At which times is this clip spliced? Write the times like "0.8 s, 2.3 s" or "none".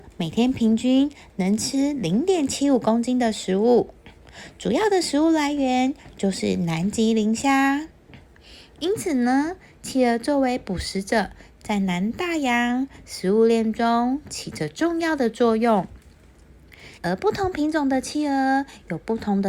16.9 s